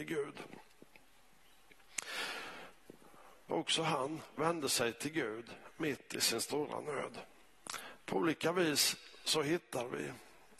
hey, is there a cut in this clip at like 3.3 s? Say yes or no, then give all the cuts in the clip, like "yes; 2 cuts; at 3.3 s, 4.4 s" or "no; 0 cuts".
yes; 2 cuts; at 3.3 s, 8.0 s